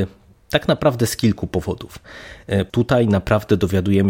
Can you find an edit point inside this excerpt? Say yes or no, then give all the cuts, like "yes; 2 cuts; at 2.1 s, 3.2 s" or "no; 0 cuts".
yes; 1 cut; at 2.7 s